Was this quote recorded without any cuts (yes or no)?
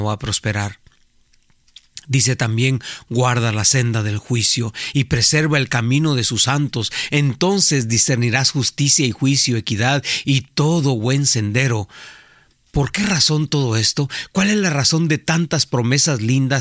yes